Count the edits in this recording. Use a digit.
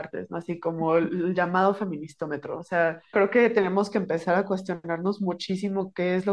1